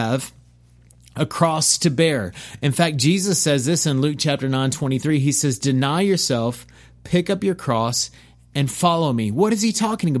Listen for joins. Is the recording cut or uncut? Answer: uncut